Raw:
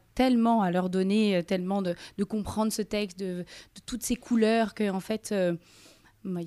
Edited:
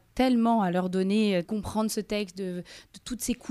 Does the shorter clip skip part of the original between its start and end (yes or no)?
yes